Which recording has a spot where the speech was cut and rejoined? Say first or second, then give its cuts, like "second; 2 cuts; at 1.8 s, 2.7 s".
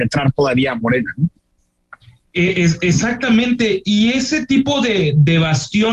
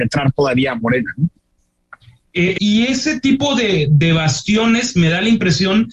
second; 1 cut; at 2.6 s